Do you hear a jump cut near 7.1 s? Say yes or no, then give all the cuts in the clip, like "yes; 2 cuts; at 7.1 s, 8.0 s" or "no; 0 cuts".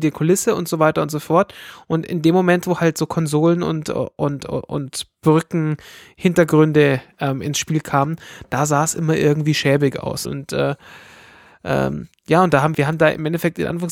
no; 2 cuts; at 10.2 s, 12.7 s